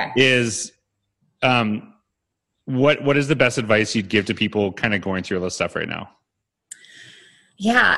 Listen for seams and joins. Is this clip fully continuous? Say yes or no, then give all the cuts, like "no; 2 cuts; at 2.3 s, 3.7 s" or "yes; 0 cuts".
yes; 0 cuts